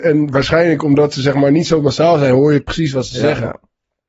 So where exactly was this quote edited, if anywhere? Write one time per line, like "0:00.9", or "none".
none